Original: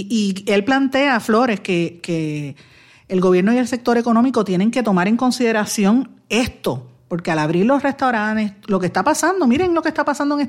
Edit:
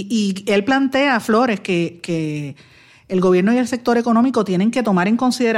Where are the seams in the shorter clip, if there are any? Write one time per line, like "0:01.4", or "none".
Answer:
none

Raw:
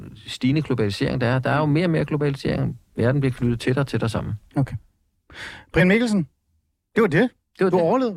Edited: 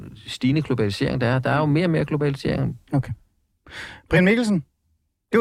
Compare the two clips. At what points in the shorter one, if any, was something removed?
0:02.9

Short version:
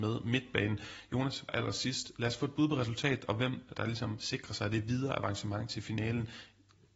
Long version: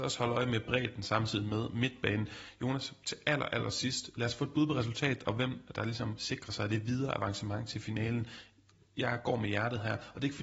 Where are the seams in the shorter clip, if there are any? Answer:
0:01.5

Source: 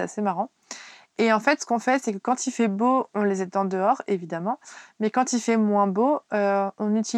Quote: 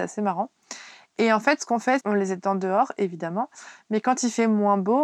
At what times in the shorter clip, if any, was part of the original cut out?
0:02.0

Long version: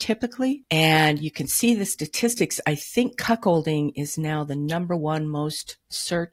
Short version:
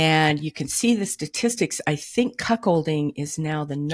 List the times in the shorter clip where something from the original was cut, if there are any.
none

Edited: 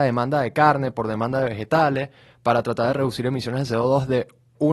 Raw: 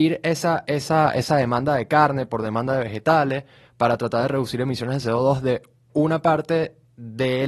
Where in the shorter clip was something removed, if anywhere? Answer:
none

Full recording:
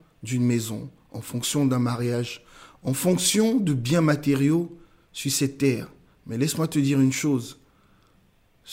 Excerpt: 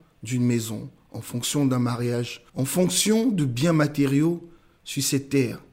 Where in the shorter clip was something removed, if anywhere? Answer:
0:02.5

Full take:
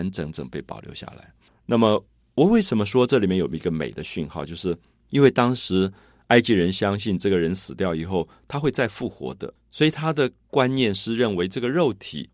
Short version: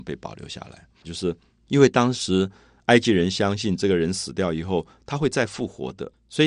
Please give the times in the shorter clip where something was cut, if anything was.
0:01.0

